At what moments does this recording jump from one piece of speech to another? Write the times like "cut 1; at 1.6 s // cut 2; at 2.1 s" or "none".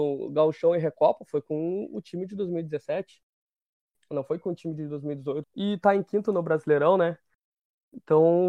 cut 1; at 5.4 s